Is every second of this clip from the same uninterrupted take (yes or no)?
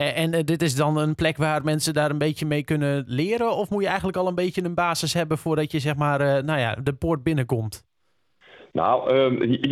yes